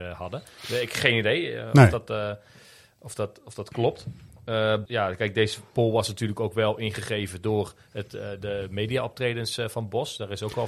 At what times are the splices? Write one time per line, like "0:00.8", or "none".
0:04.9